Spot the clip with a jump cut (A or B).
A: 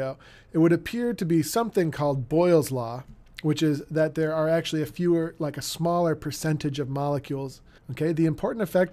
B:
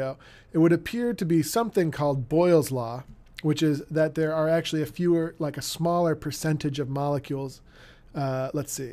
A